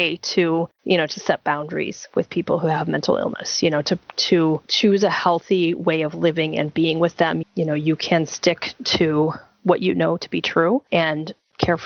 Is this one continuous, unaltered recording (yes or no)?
no